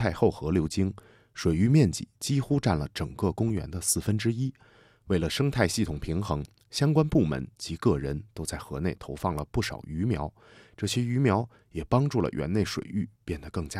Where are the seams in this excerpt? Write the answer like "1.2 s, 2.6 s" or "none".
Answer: none